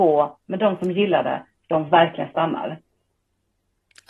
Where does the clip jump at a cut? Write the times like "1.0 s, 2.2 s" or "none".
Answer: none